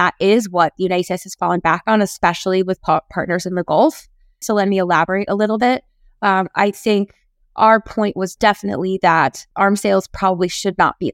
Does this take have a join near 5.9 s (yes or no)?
no